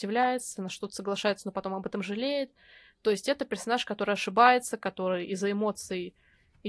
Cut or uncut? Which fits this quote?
uncut